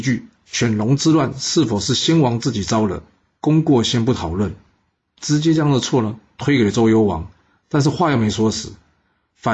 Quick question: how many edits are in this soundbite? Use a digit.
0